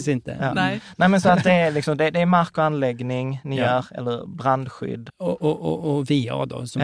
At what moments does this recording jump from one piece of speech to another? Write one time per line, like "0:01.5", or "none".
0:01.2
0:05.1

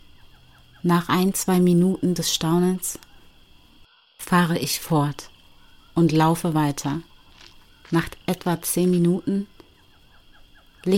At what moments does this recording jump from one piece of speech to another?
none

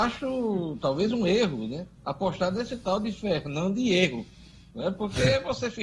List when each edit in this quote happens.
0:02.0

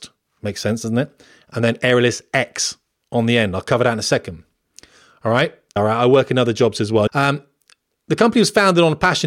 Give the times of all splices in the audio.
0:05.8
0:07.1

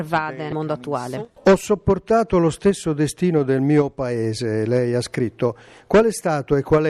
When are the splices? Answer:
none

